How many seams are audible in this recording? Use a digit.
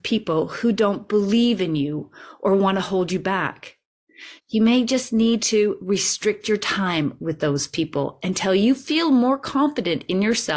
1